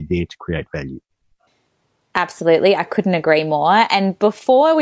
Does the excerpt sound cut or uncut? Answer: uncut